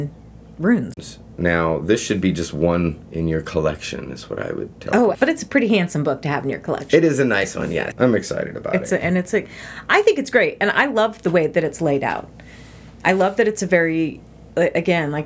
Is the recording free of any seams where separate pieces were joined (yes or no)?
no